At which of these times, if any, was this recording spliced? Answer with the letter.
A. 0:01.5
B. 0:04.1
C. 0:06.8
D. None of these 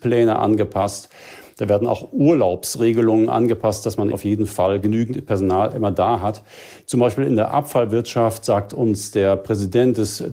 B